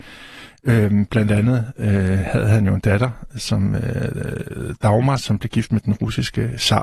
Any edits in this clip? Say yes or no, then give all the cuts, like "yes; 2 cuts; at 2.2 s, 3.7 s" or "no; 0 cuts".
no; 0 cuts